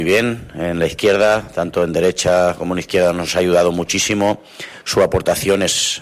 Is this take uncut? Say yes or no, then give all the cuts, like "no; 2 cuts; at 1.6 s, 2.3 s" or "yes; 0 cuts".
yes; 0 cuts